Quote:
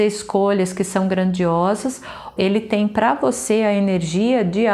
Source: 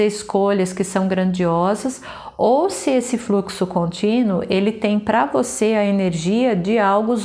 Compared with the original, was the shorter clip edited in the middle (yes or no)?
yes